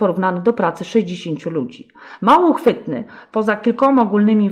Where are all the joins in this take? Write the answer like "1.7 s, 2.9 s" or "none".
2.2 s